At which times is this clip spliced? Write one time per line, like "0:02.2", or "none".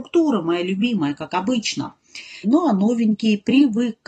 0:02.4